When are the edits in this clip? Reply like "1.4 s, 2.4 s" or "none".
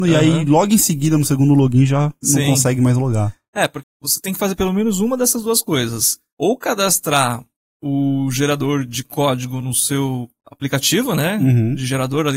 3.8 s